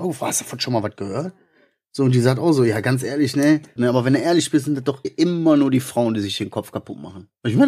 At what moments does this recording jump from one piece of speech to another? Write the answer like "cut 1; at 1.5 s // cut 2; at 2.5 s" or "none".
cut 1; at 3.8 s // cut 2; at 5.0 s